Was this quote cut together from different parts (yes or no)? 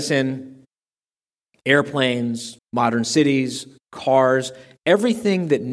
yes